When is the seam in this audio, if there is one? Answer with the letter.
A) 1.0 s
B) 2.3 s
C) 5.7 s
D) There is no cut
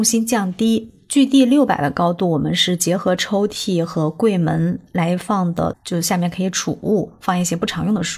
C